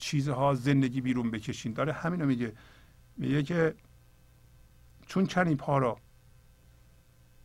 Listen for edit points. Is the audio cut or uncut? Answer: uncut